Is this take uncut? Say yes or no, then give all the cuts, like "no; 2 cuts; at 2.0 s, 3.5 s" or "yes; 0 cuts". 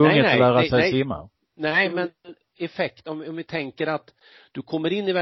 yes; 0 cuts